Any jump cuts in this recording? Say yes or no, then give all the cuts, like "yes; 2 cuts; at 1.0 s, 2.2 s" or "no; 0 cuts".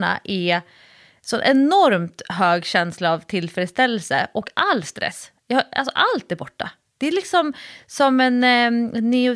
no; 0 cuts